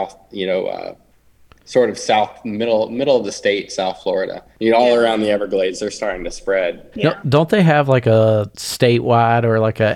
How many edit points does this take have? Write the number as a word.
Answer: two